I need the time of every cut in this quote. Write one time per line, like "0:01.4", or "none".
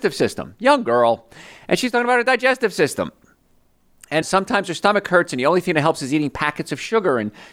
0:04.2